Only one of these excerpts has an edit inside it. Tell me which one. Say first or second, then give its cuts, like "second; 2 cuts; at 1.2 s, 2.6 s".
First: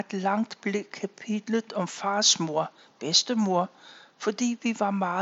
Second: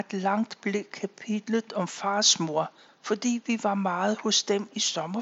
second; 1 cut; at 2.9 s